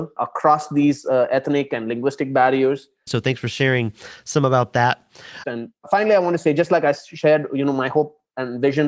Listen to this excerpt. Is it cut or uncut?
cut